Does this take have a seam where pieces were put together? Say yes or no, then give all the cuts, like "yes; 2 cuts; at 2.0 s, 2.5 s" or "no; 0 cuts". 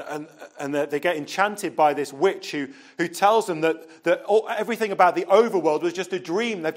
no; 0 cuts